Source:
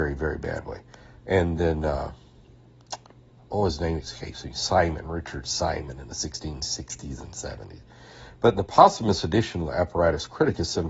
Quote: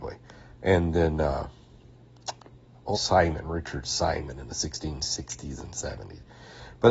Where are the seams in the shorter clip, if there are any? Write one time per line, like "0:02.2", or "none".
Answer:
0:02.9